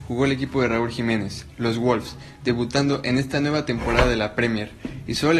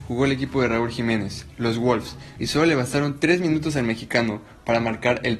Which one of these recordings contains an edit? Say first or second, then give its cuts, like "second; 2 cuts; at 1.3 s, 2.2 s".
second; 1 cut; at 2.4 s